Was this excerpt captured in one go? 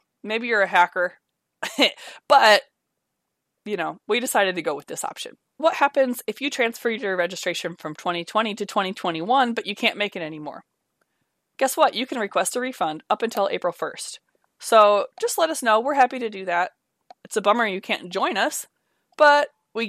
no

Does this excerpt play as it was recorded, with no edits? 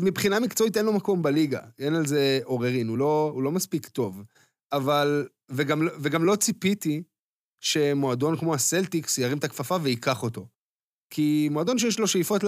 yes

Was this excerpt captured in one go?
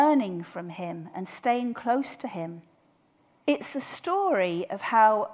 no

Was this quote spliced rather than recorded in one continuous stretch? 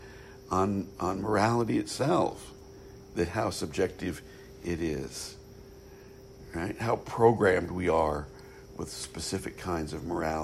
no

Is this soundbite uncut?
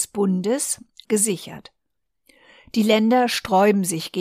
no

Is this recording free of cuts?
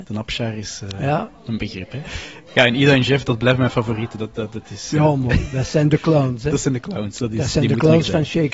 no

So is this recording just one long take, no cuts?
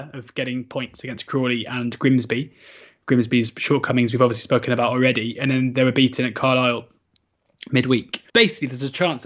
no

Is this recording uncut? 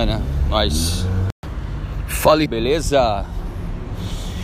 no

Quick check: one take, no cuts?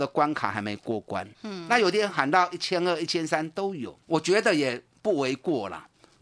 no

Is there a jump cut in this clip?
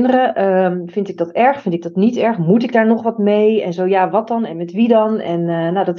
no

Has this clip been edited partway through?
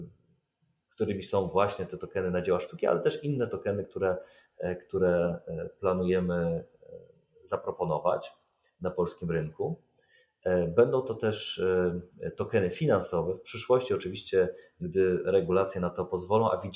no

